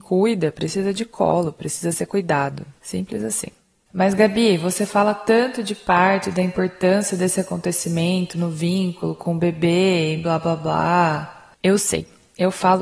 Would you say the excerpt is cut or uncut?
uncut